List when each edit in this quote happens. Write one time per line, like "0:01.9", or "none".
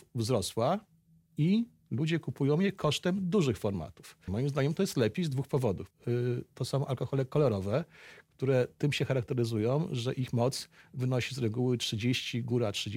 0:04.3
0:05.9